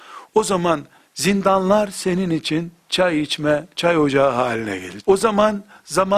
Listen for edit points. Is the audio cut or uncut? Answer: cut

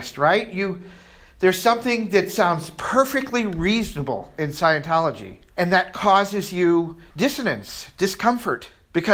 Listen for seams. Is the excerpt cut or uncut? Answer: uncut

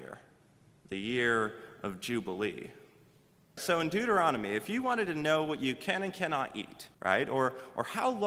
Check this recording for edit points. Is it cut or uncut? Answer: cut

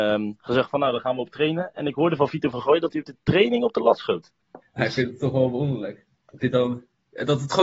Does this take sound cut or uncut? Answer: cut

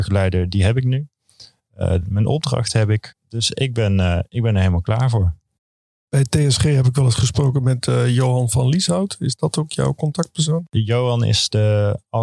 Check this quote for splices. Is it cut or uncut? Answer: uncut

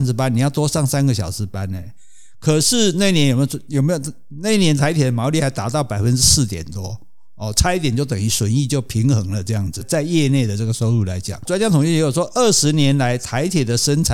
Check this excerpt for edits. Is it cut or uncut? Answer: cut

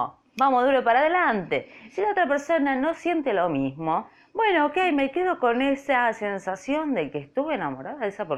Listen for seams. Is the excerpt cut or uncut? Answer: uncut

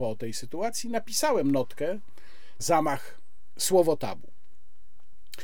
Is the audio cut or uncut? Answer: cut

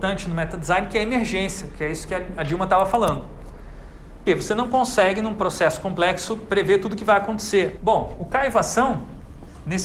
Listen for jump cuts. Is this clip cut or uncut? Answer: cut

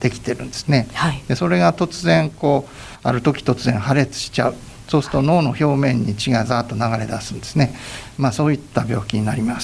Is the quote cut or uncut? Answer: uncut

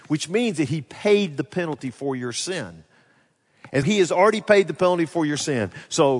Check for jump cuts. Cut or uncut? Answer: cut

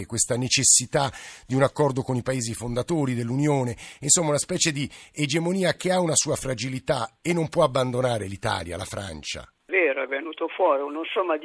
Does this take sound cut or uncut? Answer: cut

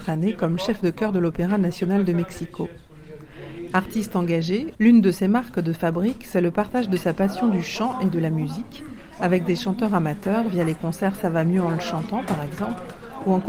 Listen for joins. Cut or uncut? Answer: cut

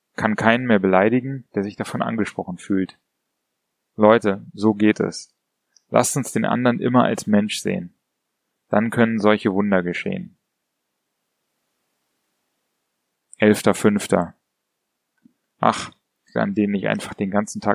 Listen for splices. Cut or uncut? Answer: cut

